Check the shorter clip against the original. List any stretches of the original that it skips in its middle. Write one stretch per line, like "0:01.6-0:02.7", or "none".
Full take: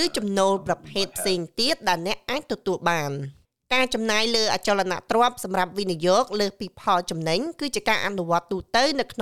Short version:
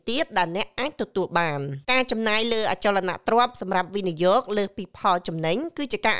0:03.3-0:03.7